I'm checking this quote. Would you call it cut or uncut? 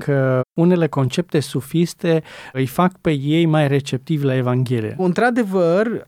cut